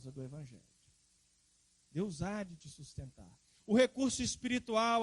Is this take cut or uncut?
cut